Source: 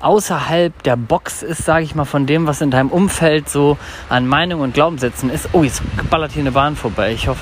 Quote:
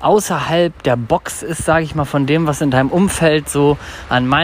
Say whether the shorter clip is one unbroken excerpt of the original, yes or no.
yes